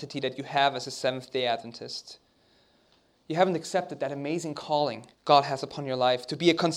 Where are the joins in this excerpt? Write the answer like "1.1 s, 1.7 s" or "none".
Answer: 5.1 s